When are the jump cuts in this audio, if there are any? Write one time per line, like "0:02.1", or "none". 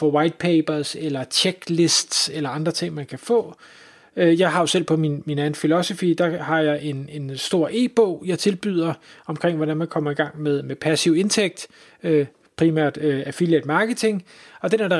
none